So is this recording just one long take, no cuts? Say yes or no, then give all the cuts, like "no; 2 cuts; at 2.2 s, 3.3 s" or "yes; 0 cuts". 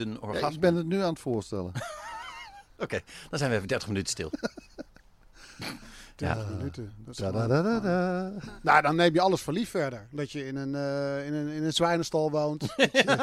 yes; 0 cuts